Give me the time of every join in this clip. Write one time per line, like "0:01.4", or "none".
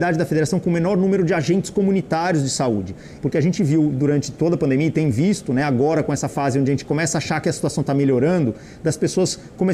0:03.2